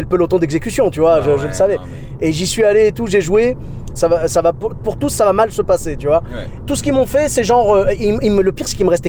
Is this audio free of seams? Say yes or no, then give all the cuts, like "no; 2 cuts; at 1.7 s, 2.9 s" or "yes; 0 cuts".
no; 2 cuts; at 4.0 s, 6.6 s